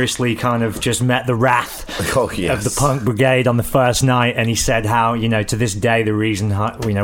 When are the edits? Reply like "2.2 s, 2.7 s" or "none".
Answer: none